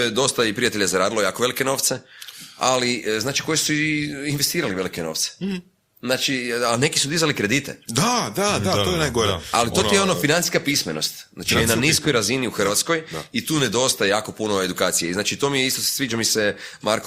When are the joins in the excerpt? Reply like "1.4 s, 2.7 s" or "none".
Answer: none